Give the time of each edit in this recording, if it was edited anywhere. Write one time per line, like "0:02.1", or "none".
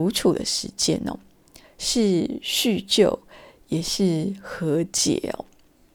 0:01.6